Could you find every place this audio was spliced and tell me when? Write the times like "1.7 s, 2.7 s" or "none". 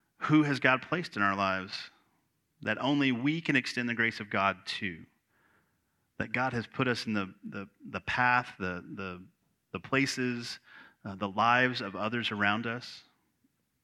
none